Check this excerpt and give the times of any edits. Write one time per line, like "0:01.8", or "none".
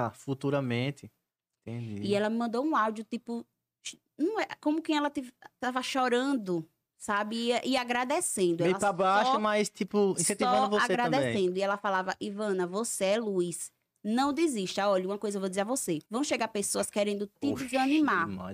0:16.0